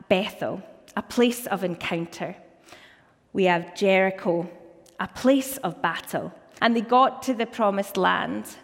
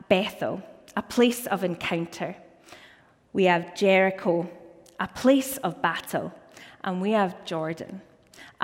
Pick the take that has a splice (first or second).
first